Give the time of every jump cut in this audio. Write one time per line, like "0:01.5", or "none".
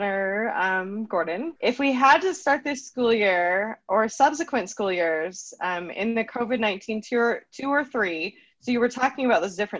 0:01.6